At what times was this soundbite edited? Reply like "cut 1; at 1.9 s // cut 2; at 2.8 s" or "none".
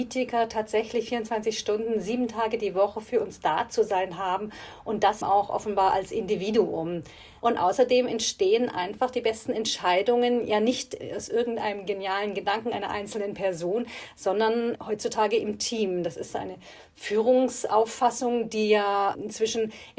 cut 1; at 5.2 s // cut 2; at 7.4 s